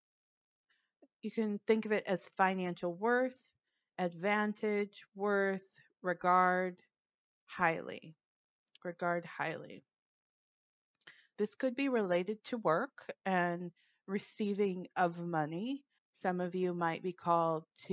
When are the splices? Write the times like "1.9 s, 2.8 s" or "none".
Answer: 11.4 s, 16.0 s